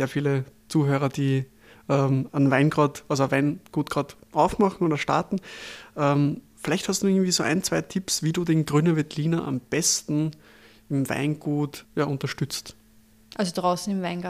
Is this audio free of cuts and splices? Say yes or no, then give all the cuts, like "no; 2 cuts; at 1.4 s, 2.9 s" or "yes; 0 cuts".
no; 1 cut; at 11.8 s